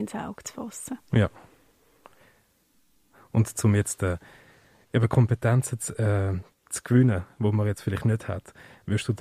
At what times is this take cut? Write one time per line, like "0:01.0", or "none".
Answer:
0:06.5